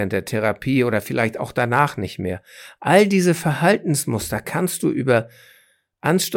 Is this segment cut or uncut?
uncut